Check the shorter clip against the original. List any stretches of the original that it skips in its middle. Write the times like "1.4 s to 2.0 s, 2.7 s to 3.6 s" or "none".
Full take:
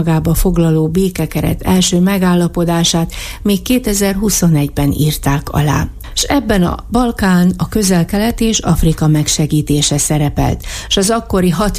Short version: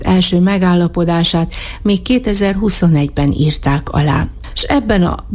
none